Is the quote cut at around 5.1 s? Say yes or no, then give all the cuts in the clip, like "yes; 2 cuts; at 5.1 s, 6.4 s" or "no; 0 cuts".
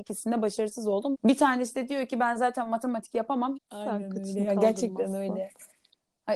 no; 2 cuts; at 1.1 s, 3.5 s